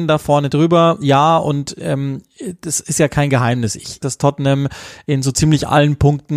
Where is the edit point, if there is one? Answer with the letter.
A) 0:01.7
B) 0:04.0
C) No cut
B